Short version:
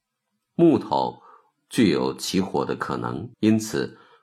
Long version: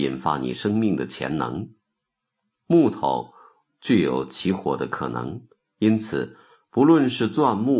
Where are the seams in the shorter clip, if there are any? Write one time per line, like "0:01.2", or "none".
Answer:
0:03.3

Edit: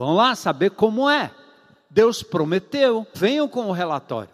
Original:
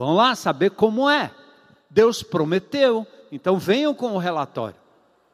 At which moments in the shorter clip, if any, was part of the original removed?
0:03.1

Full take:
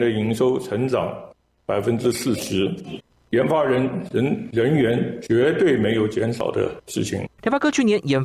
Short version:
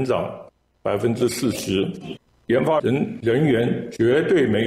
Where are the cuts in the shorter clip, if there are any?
0:02.8

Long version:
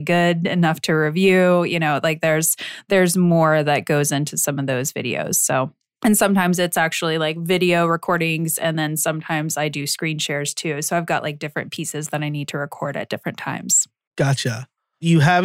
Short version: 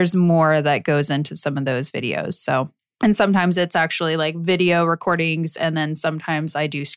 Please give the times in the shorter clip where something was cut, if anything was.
none

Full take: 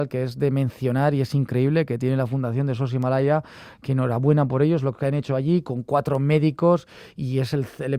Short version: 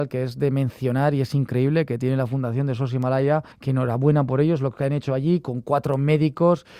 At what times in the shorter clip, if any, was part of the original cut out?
0:03.5

